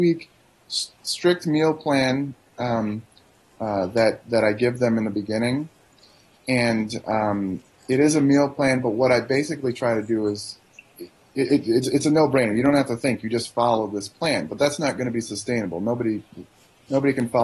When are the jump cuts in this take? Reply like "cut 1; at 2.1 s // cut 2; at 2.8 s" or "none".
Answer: none